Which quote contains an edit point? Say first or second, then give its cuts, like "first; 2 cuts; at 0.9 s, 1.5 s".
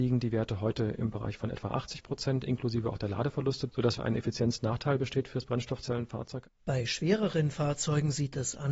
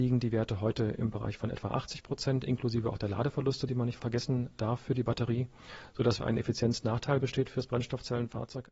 first; 1 cut; at 3.7 s